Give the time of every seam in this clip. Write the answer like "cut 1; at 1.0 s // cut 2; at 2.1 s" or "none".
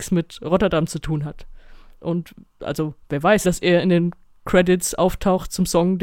cut 1; at 2.0 s // cut 2; at 3.4 s